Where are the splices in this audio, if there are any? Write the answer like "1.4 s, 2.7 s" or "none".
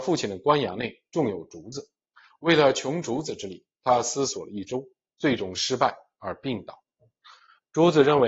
none